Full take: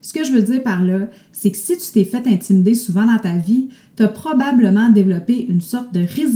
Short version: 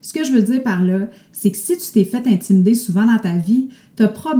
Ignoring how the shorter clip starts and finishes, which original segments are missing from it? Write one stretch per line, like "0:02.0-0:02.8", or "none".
none